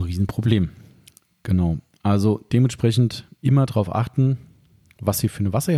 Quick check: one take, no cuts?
yes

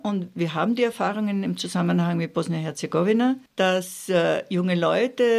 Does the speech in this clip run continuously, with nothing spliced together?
no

